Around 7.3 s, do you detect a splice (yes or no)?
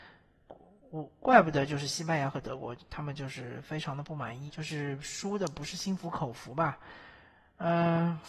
no